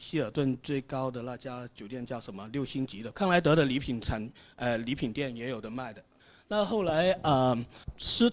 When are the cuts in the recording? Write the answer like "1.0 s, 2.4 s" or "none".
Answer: 3.1 s